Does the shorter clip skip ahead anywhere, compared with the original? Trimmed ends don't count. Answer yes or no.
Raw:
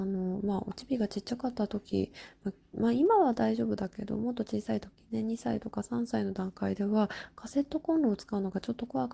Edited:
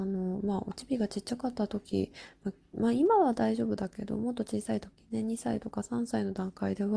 no